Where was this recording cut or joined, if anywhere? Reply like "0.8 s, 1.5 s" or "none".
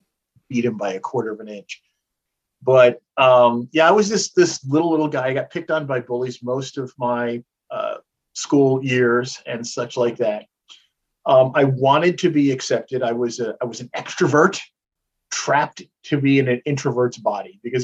none